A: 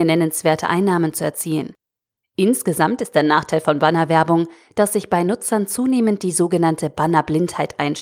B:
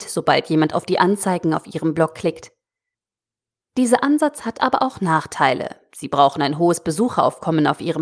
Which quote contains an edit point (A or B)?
A